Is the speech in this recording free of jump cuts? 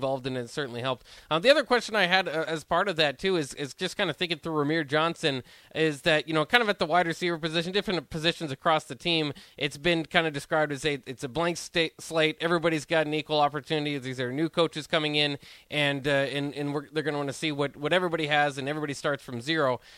yes; 0 cuts

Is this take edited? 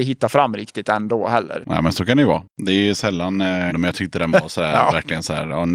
yes; 2 cuts; at 1.6 s, 3.7 s

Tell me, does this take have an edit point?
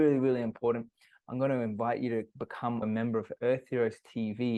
yes; 1 cut; at 2.8 s

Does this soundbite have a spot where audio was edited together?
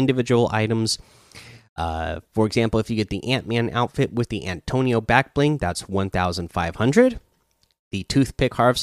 no; 0 cuts

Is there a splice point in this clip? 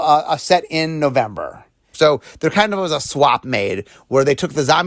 yes; 1 cut; at 1.9 s

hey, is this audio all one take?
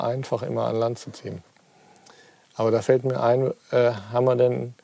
yes; 0 cuts

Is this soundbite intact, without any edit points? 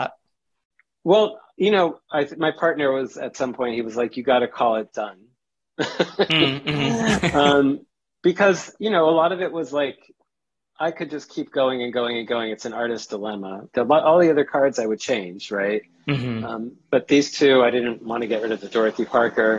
no; 1 cut; at 13.7 s

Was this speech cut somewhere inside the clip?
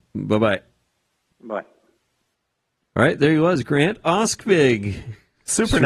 no; 0 cuts

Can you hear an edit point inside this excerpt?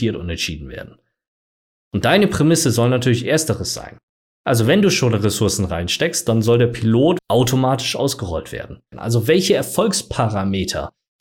yes; 2 cuts; at 7.2 s, 8.9 s

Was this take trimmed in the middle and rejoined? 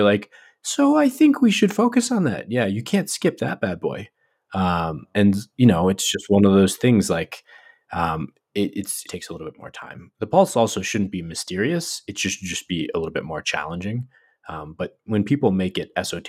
yes; 1 cut; at 9.1 s

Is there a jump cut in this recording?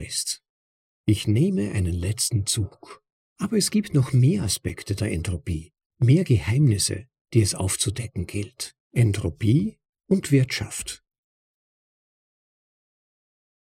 yes; 2 cuts; at 3.3 s, 8.8 s

